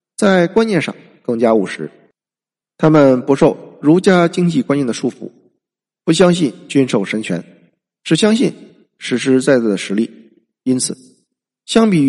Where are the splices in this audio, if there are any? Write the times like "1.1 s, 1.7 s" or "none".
none